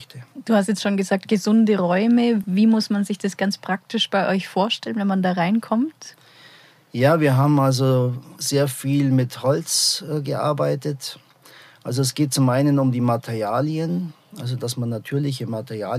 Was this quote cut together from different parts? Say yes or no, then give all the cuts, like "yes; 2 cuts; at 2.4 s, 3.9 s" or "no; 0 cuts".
no; 0 cuts